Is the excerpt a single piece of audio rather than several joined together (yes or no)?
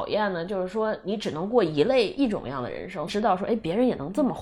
no